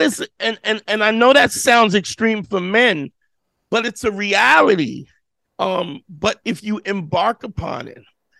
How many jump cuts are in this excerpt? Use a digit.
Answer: 1